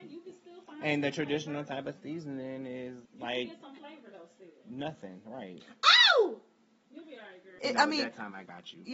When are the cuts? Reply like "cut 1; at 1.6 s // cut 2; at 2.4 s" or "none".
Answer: cut 1; at 3.1 s // cut 2; at 7.6 s